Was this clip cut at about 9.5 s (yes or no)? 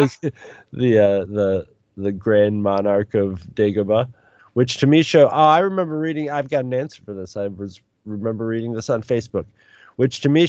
no